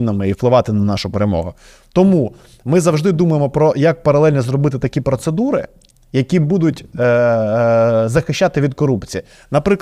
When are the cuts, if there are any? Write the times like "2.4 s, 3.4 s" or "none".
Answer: none